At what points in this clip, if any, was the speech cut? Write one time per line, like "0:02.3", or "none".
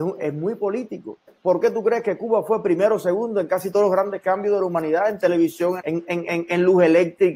0:01.3
0:05.8